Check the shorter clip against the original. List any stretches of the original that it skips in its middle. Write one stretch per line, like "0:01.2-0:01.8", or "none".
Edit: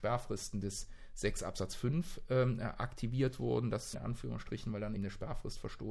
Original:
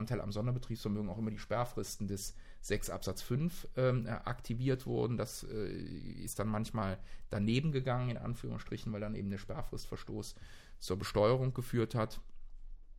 0:05.4-0:08.1
0:09.2-0:09.2